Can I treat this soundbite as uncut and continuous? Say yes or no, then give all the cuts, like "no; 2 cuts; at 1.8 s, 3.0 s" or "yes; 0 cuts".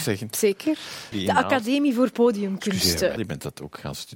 no; 2 cuts; at 1.1 s, 3.2 s